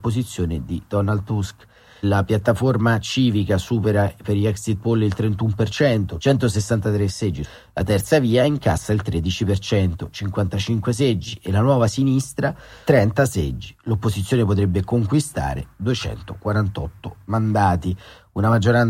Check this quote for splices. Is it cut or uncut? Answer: uncut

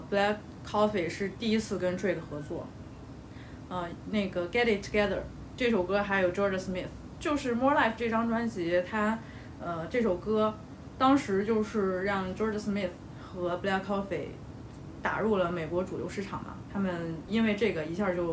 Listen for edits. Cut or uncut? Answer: cut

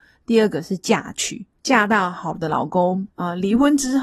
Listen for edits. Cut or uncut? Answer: cut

